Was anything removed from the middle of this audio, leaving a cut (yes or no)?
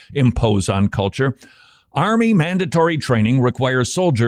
no